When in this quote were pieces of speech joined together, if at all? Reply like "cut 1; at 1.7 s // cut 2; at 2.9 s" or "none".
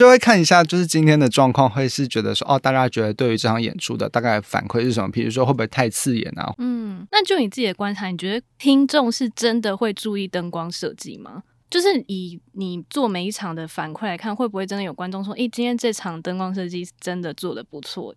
cut 1; at 6.5 s